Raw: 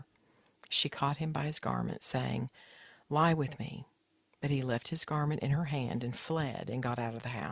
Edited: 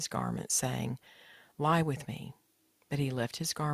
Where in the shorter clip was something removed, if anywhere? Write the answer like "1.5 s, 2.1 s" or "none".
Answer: none